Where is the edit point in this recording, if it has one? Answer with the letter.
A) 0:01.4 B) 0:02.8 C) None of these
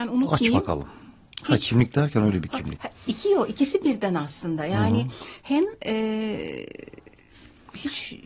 A